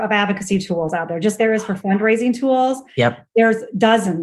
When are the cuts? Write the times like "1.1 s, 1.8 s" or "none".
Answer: 1.4 s